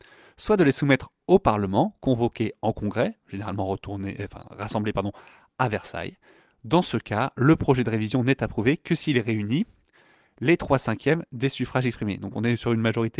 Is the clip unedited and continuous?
yes; 0 cuts

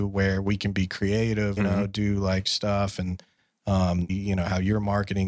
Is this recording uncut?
no; 2 cuts; at 1.6 s, 4.1 s

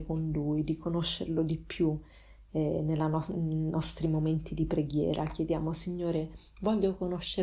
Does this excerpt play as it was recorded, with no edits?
yes; 0 cuts

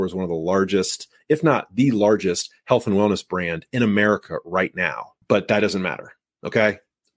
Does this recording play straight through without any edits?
no; 1 cut; at 5.2 s

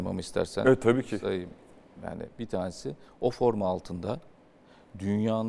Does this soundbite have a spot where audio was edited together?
no; 0 cuts

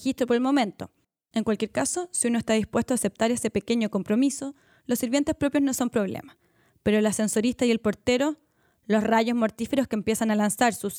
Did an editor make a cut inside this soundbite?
no; 0 cuts

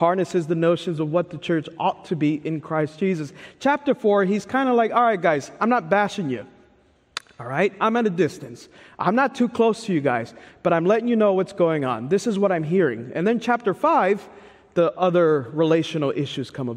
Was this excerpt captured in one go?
yes; 0 cuts

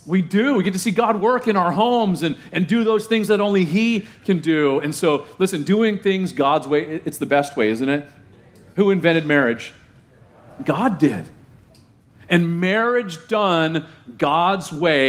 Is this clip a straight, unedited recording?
yes; 0 cuts

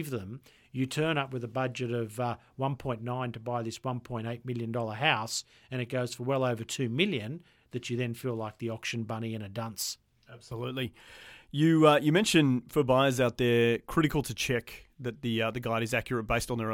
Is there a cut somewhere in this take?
no; 0 cuts

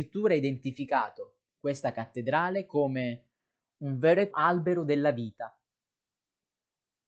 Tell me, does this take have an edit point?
yes; 1 cut; at 4.3 s

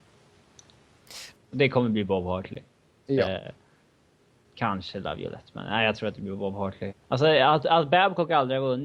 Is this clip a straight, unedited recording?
no; 2 cuts; at 1.4 s, 6.9 s

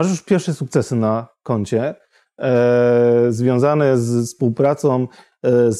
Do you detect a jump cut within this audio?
no; 0 cuts

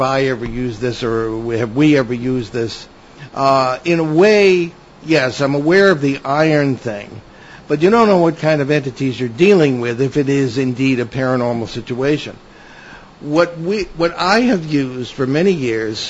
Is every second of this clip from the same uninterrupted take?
yes; 0 cuts

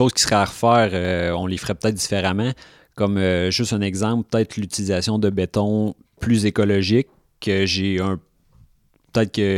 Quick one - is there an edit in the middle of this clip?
no; 0 cuts

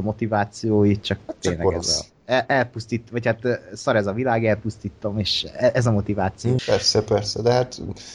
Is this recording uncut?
no; 1 cut; at 6.6 s

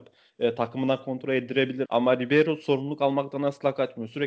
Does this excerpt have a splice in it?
yes; 1 cut; at 1.9 s

